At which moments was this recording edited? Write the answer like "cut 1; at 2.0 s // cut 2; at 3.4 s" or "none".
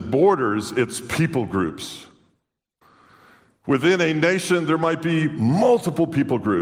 none